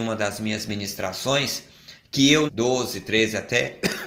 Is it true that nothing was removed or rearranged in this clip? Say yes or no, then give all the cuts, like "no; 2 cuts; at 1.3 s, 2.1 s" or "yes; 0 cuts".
no; 1 cut; at 2.5 s